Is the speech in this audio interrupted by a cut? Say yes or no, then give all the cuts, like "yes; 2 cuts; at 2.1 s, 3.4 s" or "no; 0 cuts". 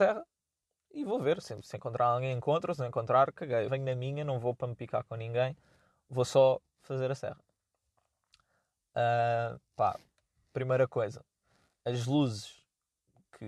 yes; 1 cut; at 3.7 s